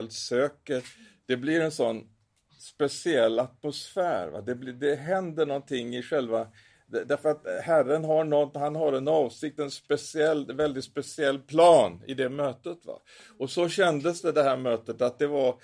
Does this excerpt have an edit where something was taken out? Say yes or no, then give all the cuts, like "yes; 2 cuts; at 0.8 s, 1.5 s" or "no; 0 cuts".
no; 0 cuts